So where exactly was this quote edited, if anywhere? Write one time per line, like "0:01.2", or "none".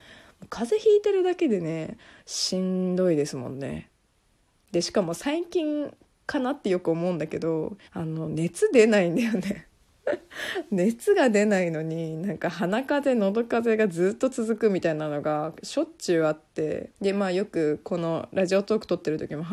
0:07.8
0:16.9